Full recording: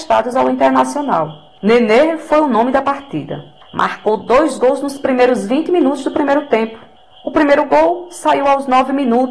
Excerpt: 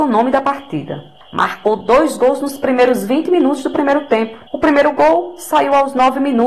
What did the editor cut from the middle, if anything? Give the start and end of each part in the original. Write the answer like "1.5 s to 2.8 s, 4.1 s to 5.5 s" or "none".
6.9 s to 7.2 s